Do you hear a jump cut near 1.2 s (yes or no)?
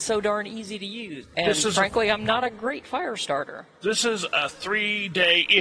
yes